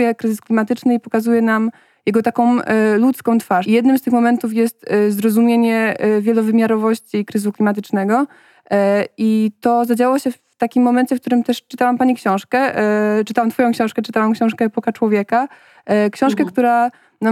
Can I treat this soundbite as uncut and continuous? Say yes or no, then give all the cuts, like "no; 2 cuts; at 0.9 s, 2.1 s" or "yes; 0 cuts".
no; 1 cut; at 3.6 s